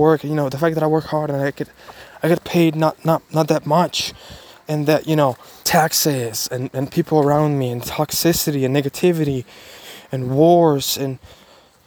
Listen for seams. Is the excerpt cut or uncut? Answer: cut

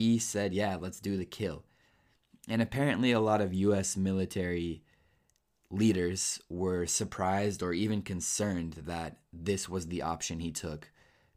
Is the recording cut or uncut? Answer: uncut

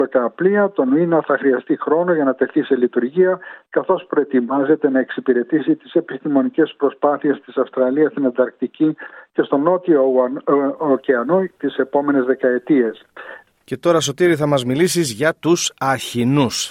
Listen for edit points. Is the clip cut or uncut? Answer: cut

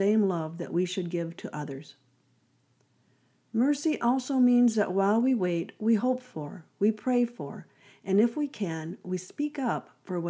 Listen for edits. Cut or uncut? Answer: uncut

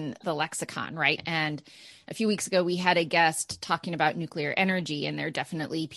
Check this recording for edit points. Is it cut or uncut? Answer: cut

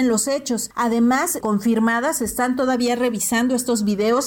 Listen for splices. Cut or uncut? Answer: cut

